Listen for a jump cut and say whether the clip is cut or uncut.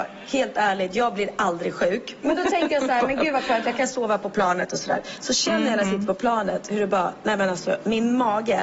cut